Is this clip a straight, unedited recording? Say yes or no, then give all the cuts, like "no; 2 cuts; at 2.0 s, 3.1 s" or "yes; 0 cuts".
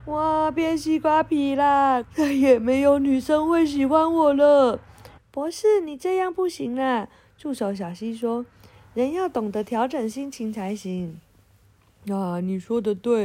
no; 2 cuts; at 2.0 s, 5.2 s